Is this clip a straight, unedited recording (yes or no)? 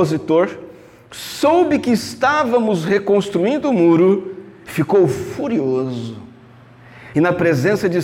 no